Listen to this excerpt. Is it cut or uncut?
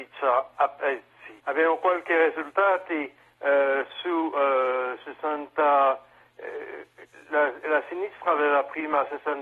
cut